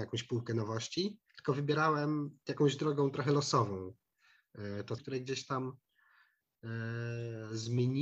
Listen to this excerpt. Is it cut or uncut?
cut